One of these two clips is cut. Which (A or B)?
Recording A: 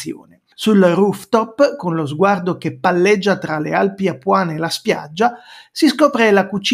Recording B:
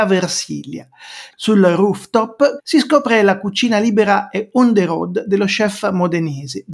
B